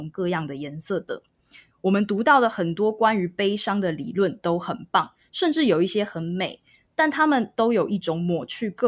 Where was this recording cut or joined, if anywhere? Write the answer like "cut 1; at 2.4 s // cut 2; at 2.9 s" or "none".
none